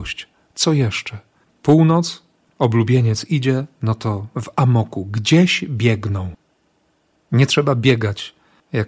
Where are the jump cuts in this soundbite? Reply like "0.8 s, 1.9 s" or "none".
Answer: 1.4 s, 7.1 s